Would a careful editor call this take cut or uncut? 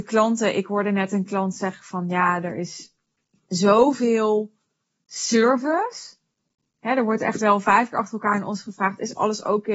uncut